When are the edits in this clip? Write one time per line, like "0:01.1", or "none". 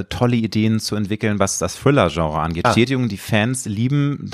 0:02.6